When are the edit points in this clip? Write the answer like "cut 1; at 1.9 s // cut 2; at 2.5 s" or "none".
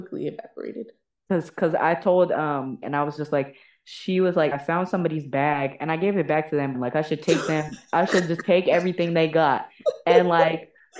cut 1; at 2.8 s // cut 2; at 4.5 s // cut 3; at 6.7 s